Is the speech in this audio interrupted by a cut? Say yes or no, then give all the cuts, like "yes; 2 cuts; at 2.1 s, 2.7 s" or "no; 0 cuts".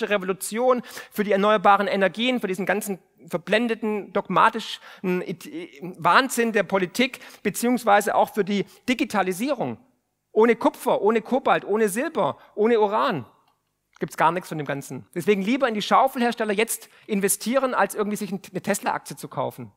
no; 0 cuts